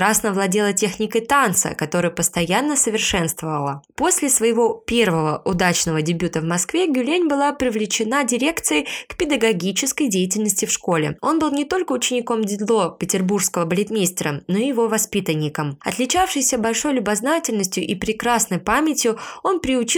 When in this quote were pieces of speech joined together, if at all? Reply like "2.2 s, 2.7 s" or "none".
11.2 s